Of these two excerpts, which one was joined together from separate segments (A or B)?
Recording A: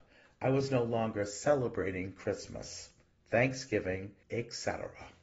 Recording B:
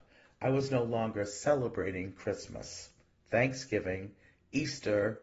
A